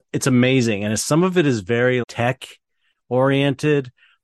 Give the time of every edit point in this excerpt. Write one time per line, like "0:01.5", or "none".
0:02.0